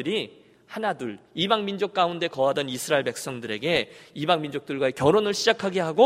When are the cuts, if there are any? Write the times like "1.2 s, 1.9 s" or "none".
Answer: none